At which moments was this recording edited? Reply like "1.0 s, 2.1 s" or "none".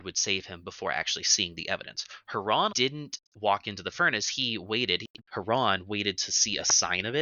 2.7 s, 5.2 s